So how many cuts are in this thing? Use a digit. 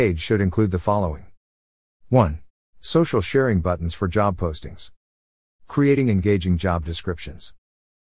1